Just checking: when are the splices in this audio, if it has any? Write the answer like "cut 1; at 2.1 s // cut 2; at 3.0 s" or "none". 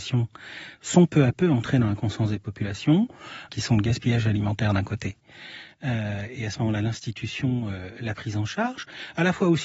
none